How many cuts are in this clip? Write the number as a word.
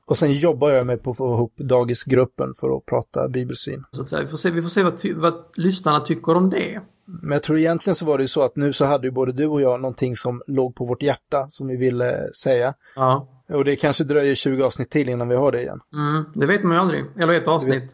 one